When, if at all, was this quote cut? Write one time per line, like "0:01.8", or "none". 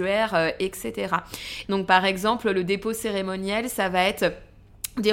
0:01.6

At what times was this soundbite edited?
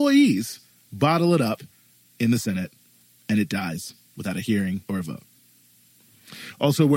0:04.8

